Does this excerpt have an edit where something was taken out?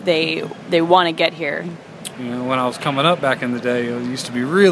yes; 1 cut; at 2.1 s

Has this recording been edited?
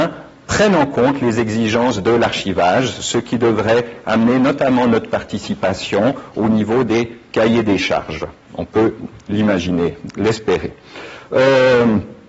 no; 0 cuts

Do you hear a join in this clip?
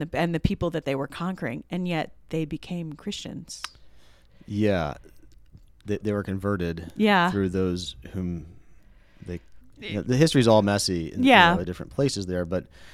yes; 2 cuts; at 9.7 s, 11.6 s

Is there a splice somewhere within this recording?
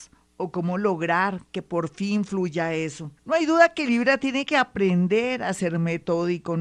yes; 1 cut; at 3.2 s

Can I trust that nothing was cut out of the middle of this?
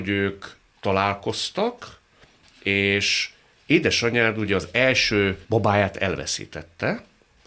no; 1 cut; at 5.4 s

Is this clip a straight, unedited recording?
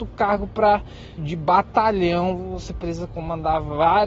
no; 1 cut; at 1.2 s

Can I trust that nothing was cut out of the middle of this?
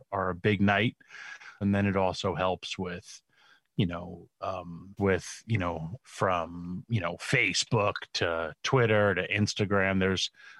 no; 3 cuts; at 1.6 s, 5.0 s, 6.0 s

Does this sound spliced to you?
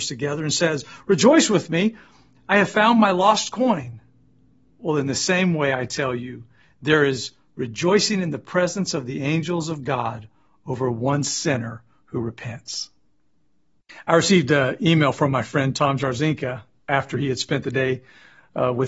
no; 0 cuts

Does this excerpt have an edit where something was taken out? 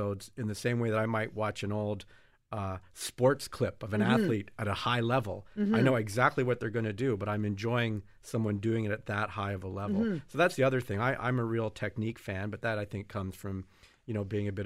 no; 0 cuts

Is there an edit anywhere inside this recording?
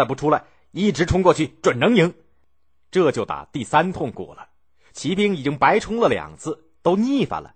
no; 0 cuts

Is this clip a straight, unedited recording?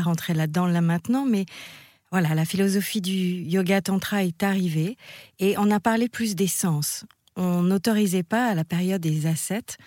yes; 0 cuts

